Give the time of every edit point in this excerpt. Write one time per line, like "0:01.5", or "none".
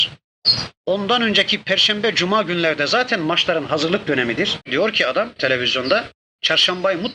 0:04.6